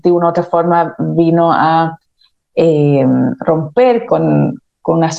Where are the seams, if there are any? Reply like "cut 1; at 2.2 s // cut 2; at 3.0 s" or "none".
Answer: cut 1; at 4.1 s